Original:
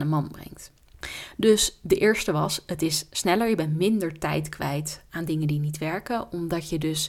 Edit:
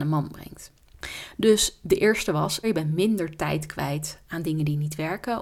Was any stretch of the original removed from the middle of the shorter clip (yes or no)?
yes